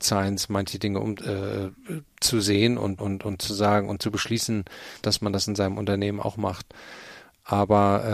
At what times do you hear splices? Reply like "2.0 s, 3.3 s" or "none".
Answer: 3.0 s, 5.0 s